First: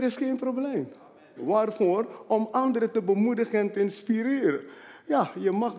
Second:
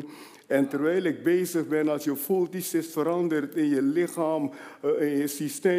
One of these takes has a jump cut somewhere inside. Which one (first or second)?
first